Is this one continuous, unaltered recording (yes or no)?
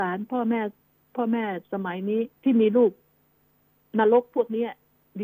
no